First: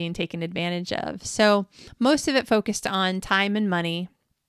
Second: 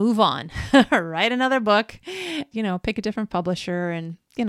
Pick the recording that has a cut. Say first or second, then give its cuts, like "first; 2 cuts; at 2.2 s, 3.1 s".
second; 1 cut; at 2.5 s